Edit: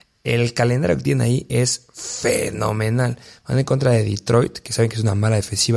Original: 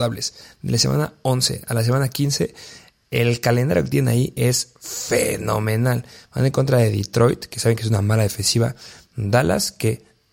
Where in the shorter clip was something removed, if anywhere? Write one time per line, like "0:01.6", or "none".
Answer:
none